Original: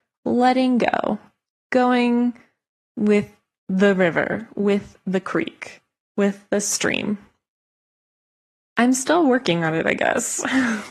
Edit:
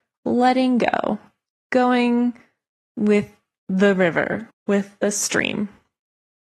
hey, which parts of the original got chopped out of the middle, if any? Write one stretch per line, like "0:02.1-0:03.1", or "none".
0:04.5-0:06.0